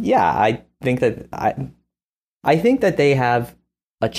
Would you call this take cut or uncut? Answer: uncut